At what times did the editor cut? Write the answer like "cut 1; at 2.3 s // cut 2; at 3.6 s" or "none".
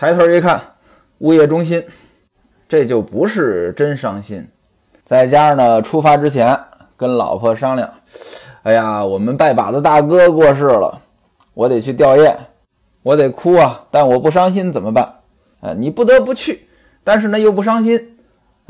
cut 1; at 5.0 s // cut 2; at 15.5 s